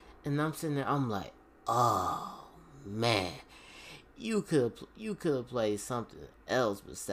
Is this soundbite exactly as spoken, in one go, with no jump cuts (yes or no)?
yes